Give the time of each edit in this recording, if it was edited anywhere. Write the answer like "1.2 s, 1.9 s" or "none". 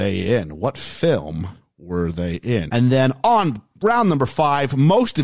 2.7 s